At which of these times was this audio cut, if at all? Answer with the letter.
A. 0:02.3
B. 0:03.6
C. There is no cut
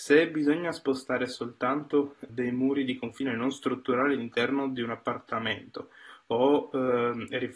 A